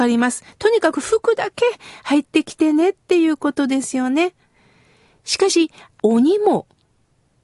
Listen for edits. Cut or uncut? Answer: cut